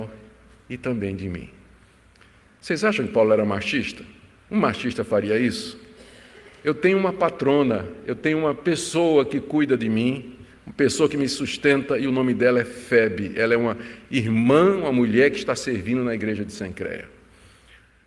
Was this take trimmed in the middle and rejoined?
no; 0 cuts

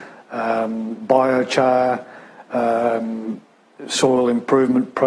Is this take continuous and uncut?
yes; 0 cuts

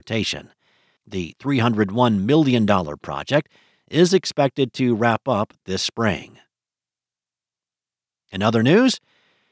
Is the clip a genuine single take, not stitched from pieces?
no; 1 cut; at 1.0 s

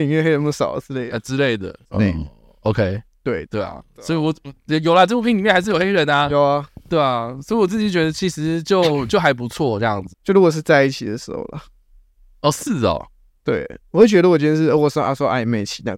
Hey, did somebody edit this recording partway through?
yes; 3 cuts; at 1.8 s, 3.5 s, 10.1 s

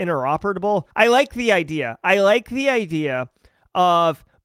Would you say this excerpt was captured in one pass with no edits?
no; 1 cut; at 0.9 s

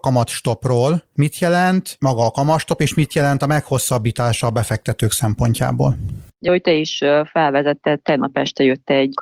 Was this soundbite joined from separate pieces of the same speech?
no; 0 cuts

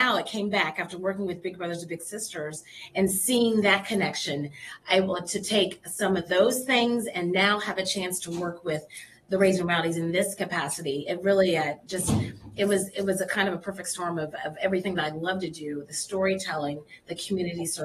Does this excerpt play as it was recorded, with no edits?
yes; 0 cuts

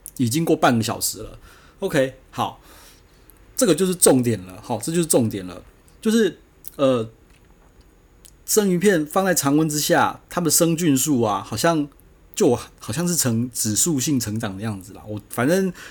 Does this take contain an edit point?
no; 0 cuts

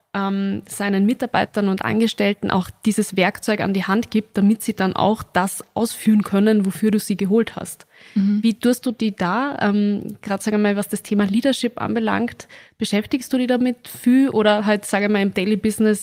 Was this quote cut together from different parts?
no; 0 cuts

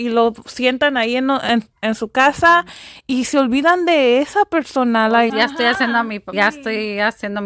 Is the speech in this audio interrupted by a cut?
yes; 2 cuts; at 5.3 s, 6.3 s

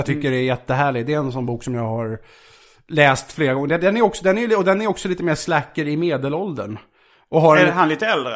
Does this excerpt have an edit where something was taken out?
no; 0 cuts

